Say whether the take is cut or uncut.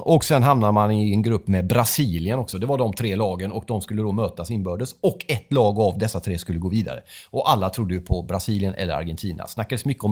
uncut